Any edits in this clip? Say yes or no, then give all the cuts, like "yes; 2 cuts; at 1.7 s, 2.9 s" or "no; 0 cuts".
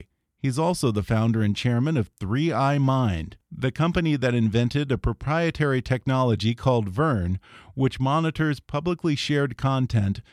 no; 0 cuts